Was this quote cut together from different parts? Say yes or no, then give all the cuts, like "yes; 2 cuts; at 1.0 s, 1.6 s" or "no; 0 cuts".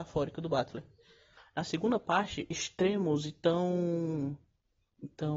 yes; 2 cuts; at 1.4 s, 2.5 s